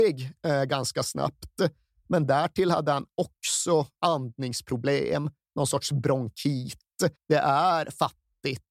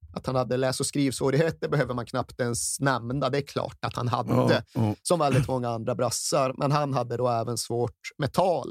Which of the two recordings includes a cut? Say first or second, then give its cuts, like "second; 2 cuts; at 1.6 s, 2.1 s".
first; 1 cut; at 7.2 s